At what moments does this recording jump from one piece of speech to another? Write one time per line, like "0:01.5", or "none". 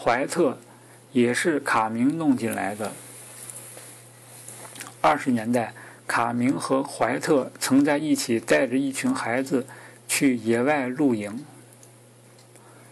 none